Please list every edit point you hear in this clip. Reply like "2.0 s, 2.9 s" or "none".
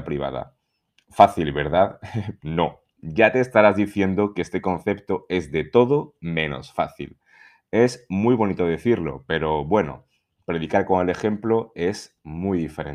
2.4 s